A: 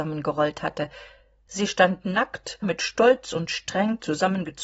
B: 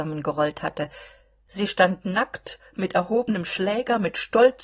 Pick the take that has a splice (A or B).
A